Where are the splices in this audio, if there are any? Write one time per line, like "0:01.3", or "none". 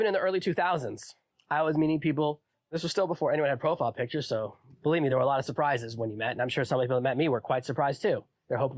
none